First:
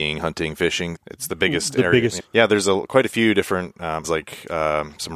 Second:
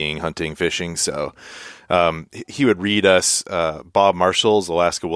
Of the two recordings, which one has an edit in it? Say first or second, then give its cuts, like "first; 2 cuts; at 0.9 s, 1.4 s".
first; 3 cuts; at 0.9 s, 2.2 s, 4.0 s